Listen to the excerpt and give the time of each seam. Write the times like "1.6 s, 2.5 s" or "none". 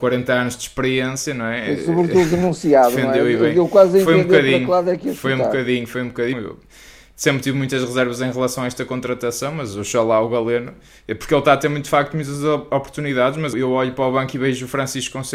6.3 s, 13.5 s